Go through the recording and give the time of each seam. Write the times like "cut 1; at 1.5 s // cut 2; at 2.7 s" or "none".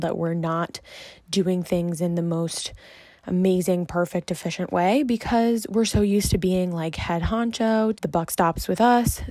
cut 1; at 7.9 s